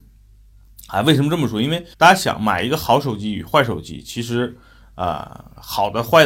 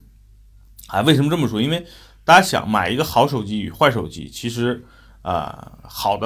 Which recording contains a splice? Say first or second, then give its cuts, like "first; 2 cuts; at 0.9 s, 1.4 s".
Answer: first; 1 cut; at 1.9 s